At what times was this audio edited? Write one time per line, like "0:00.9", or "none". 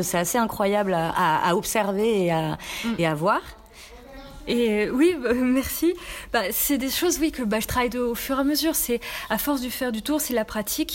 none